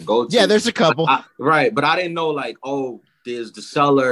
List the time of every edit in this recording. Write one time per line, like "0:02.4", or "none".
0:01.2

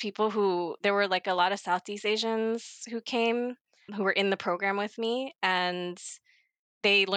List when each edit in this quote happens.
0:03.9

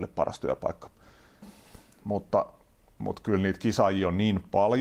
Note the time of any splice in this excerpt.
0:01.4

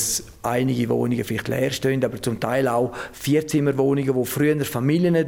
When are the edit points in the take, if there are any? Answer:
none

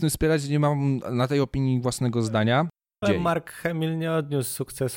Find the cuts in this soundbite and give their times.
0:03.0

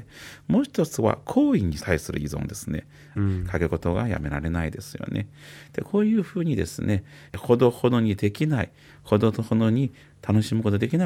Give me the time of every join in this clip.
0:03.2
0:07.3

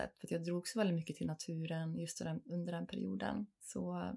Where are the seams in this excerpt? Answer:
none

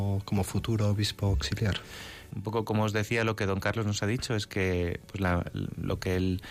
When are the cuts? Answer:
0:02.3

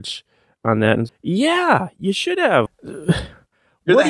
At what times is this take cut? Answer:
0:01.1
0:02.7

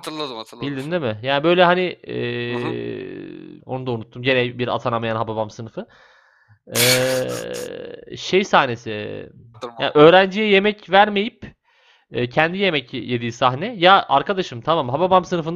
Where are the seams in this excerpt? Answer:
0:03.6
0:09.5

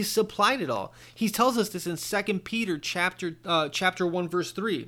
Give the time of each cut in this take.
none

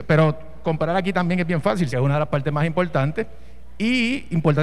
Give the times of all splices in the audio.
0:01.9

